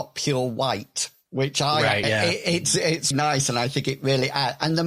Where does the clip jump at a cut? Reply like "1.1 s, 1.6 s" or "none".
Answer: 2.0 s, 3.1 s